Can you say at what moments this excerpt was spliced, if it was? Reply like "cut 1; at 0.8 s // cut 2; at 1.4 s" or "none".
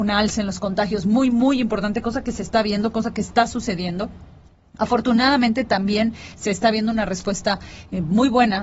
none